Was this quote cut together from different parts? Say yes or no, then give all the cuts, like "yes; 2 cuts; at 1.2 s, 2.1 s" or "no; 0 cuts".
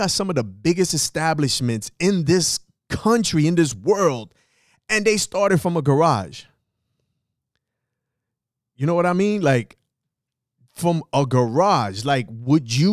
no; 0 cuts